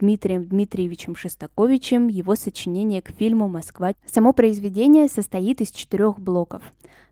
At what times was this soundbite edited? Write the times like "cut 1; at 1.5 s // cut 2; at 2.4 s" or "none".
cut 1; at 3.9 s